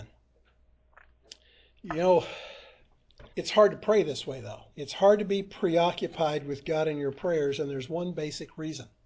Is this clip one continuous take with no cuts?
no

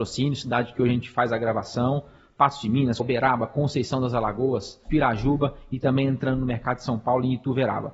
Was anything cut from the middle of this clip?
yes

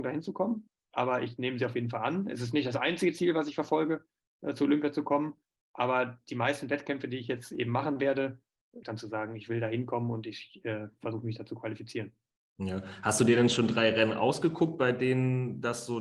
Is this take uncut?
no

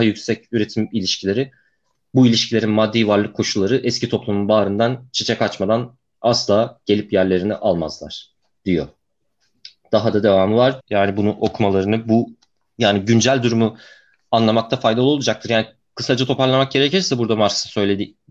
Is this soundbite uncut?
no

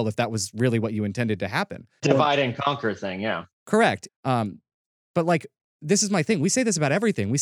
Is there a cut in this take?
yes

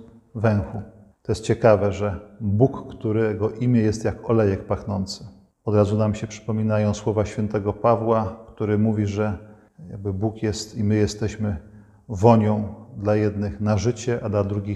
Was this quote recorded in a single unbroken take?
yes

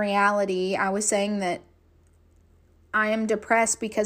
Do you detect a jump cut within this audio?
no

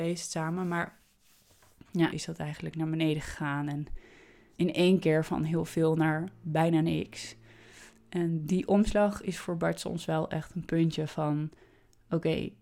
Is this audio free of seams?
no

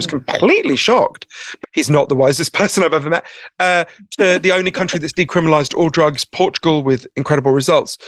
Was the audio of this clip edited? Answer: yes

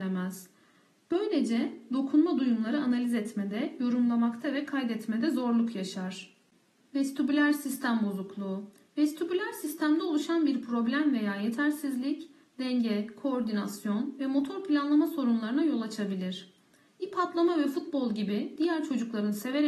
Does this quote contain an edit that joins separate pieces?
no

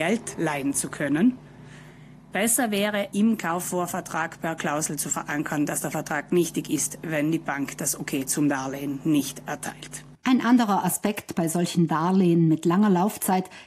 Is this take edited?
no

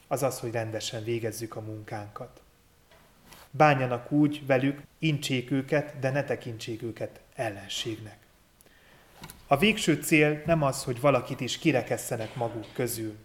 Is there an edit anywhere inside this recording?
yes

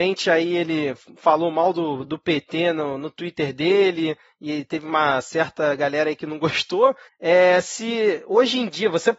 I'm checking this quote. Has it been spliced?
no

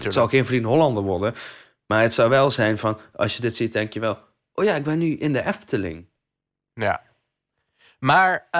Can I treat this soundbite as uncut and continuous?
yes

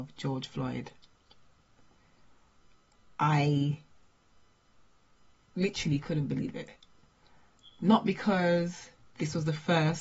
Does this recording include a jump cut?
no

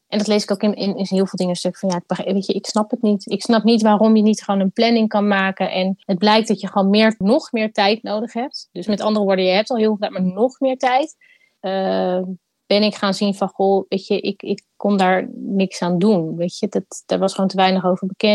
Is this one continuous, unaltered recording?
no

